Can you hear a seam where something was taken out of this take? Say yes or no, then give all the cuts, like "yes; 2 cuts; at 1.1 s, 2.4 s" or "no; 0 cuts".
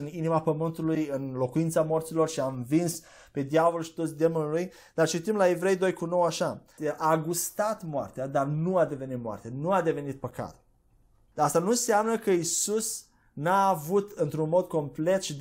yes; 1 cut; at 6.8 s